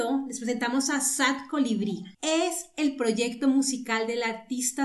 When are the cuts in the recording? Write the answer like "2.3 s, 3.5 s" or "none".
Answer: 2.1 s